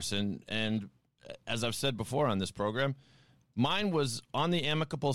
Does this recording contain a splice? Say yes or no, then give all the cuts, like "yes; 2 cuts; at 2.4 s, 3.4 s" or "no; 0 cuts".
no; 0 cuts